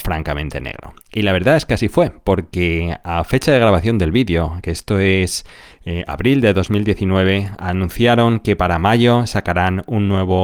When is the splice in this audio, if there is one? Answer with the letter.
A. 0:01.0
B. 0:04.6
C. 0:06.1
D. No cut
D